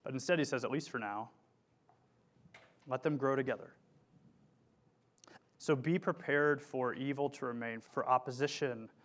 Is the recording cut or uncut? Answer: cut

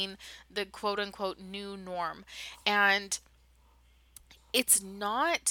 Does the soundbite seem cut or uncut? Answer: uncut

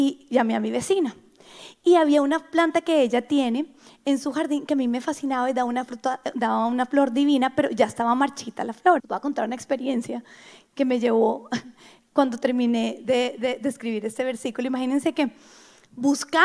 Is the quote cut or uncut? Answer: cut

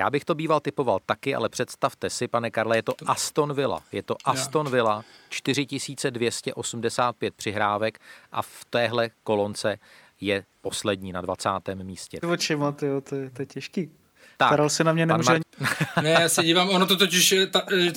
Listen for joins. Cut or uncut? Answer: cut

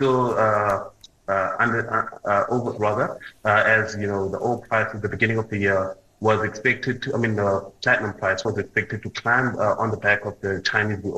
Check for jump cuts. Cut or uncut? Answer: cut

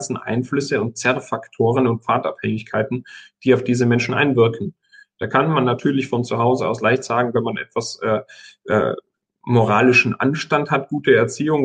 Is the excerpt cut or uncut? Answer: uncut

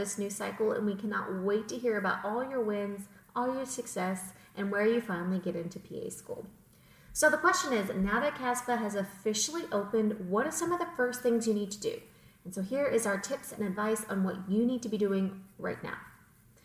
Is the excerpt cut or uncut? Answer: uncut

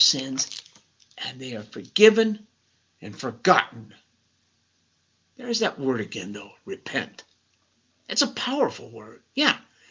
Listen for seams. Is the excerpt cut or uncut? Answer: uncut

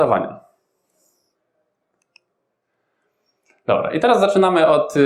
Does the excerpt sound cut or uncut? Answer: uncut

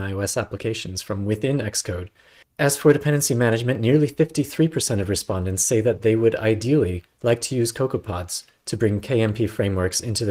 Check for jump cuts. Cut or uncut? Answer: cut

